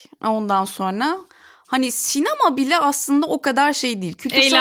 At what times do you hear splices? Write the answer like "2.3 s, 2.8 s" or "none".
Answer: none